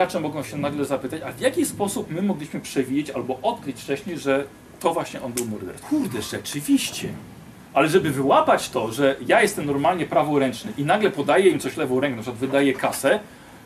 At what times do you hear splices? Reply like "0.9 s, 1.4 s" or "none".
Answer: 5.8 s